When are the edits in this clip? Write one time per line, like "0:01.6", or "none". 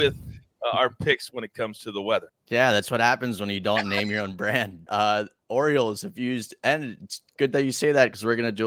0:02.3
0:04.9